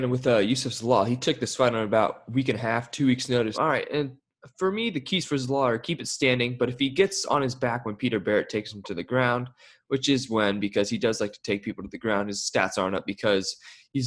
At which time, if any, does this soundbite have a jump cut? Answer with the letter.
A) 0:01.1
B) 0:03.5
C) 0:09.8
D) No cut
B